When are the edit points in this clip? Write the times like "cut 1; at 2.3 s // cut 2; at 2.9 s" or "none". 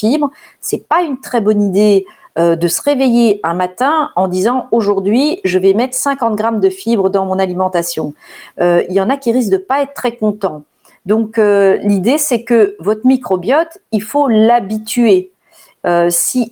none

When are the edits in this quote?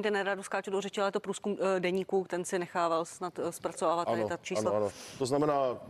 cut 1; at 2.3 s

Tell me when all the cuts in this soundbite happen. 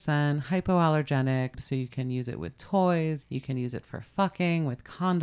cut 1; at 1.5 s // cut 2; at 3.2 s

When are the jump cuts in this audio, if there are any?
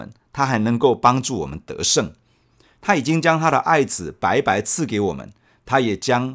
none

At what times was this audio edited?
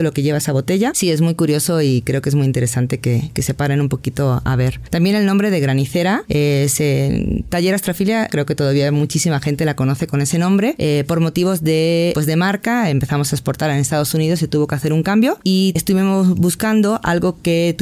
cut 1; at 8.3 s

